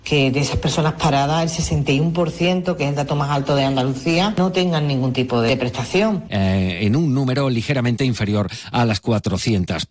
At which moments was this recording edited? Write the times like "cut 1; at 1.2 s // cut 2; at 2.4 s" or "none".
cut 1; at 6.3 s